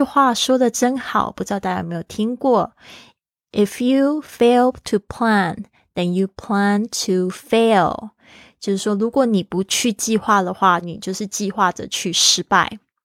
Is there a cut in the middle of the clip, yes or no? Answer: yes